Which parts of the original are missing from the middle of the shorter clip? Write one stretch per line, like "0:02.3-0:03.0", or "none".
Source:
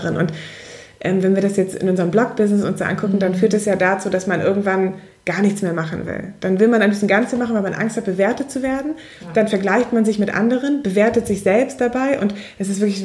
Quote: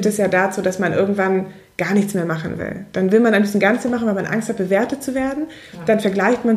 none